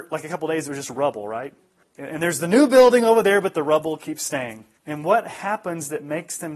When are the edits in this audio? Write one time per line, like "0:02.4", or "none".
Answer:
0:01.8
0:04.8